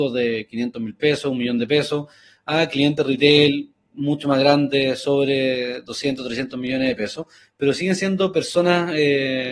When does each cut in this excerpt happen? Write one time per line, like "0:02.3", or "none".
none